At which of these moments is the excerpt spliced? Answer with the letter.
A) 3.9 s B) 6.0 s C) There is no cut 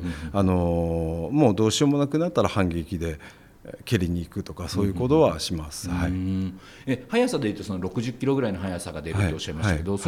C